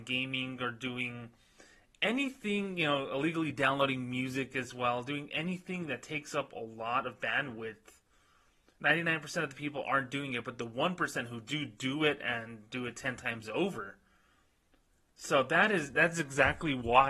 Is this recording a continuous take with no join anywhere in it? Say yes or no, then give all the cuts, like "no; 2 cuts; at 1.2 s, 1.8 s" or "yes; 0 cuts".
yes; 0 cuts